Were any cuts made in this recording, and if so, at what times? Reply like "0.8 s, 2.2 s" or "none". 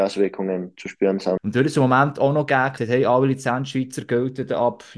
1.4 s, 2.8 s